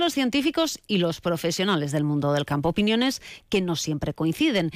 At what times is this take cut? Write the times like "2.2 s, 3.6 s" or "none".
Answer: none